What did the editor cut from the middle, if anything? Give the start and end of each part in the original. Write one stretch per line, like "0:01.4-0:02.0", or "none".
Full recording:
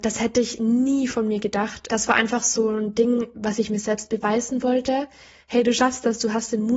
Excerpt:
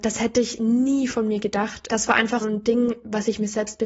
0:02.4-0:02.7